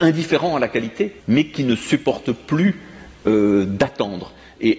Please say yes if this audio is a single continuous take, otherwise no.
no